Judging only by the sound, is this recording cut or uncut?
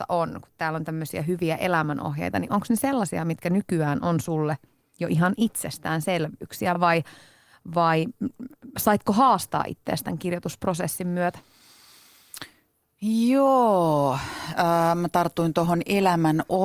uncut